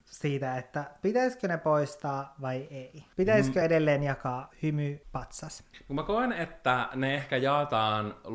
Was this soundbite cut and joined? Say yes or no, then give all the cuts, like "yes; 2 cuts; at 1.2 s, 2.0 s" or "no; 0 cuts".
no; 0 cuts